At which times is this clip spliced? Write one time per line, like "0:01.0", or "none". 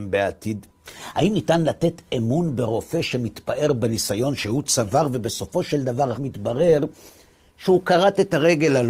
0:06.1